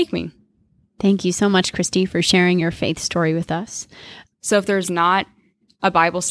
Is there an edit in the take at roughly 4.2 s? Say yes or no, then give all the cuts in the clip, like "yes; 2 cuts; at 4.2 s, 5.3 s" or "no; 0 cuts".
yes; 1 cut; at 4.2 s